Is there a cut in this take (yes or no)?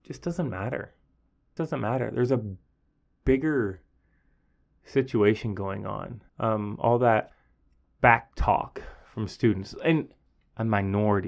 yes